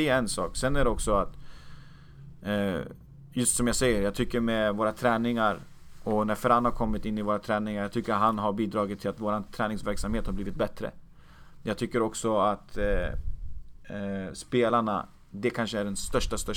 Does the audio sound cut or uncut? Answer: uncut